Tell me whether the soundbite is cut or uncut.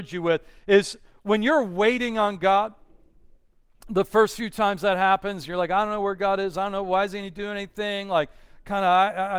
uncut